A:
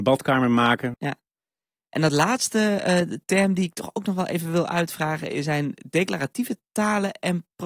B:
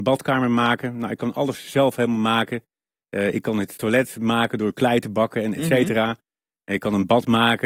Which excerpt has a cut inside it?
A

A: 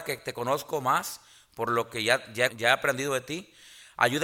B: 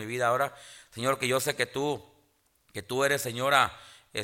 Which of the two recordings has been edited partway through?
A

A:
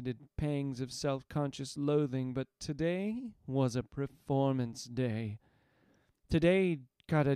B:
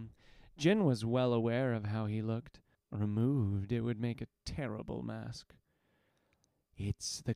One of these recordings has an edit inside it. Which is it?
B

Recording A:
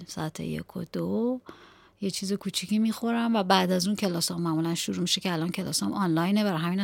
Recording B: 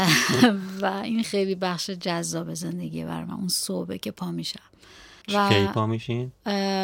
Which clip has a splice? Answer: B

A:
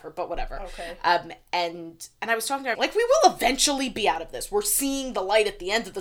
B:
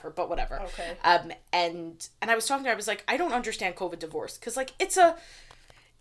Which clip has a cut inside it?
A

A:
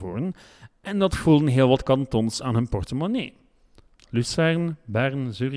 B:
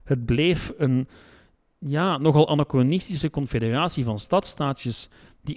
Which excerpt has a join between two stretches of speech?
A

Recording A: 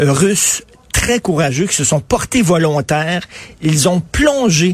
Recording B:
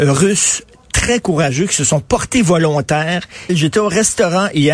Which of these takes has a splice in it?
B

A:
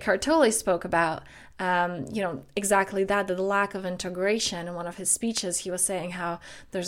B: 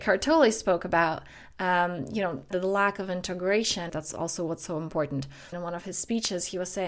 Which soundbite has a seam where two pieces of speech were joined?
B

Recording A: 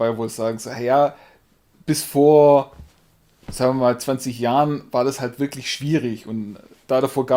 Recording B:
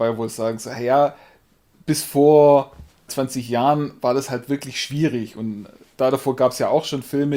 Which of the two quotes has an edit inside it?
B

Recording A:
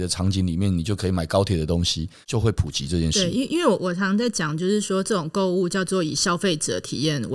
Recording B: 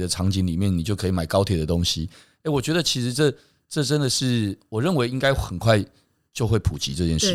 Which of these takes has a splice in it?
A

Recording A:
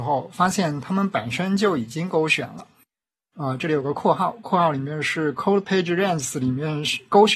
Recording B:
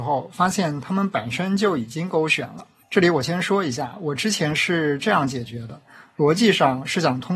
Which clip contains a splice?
B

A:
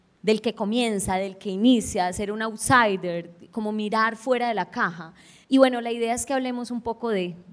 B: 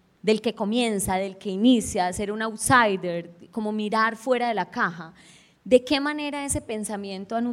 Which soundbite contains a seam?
A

